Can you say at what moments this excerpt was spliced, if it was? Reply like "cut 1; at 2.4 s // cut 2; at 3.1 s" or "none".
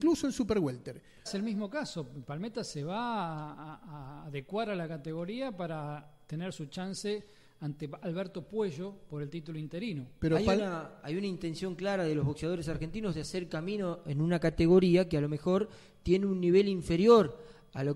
cut 1; at 1.3 s